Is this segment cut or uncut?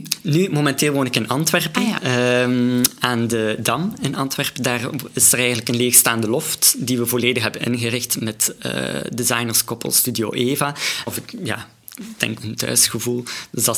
cut